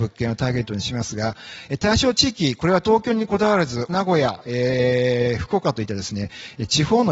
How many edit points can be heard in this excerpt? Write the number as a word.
one